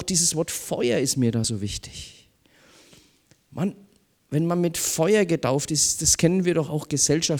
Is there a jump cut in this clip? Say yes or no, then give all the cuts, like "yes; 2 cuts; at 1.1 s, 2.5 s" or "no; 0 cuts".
no; 0 cuts